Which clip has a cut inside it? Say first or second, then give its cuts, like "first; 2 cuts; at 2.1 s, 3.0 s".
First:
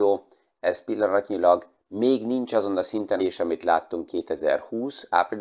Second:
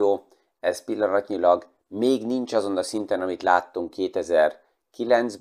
first; 1 cut; at 3.2 s